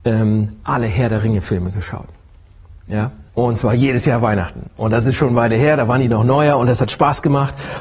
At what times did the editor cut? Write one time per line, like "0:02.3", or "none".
0:03.3